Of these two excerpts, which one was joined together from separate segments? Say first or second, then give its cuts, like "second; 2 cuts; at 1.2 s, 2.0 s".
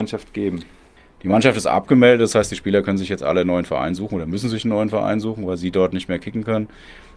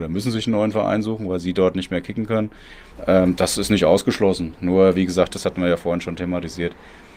second; 2 cuts; at 2.9 s, 5.3 s